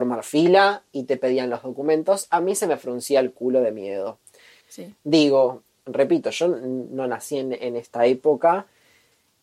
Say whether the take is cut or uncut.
cut